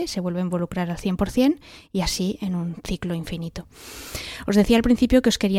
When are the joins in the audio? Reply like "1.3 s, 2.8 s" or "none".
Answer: none